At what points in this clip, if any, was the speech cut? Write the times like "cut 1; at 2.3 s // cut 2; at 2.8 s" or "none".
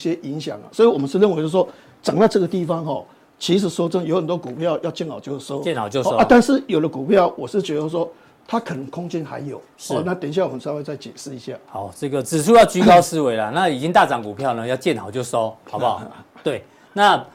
none